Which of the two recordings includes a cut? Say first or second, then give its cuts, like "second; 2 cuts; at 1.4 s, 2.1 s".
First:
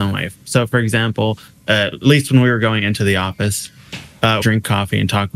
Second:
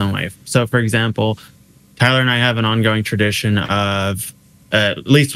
first; 2 cuts; at 1.5 s, 4.4 s